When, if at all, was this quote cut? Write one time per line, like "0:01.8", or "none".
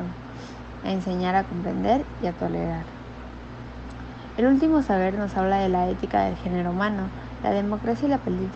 none